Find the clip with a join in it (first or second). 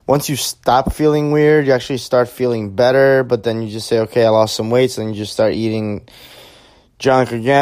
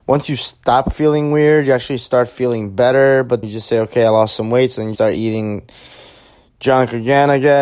second